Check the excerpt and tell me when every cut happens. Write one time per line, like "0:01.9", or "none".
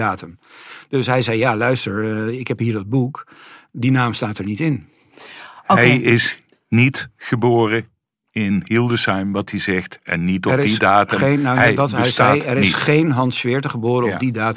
none